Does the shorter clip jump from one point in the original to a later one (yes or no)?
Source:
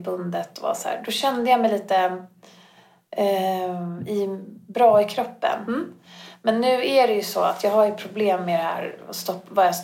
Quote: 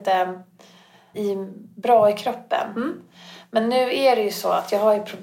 yes